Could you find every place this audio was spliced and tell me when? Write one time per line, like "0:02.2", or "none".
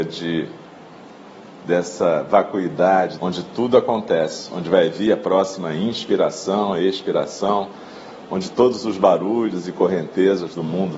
0:03.2